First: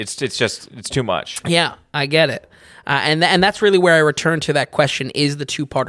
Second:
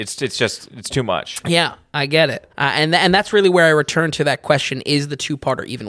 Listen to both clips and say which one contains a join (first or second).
second